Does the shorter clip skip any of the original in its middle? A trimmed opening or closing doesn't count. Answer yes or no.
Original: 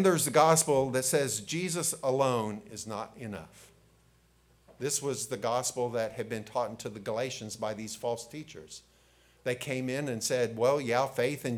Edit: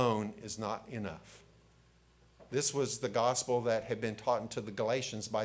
no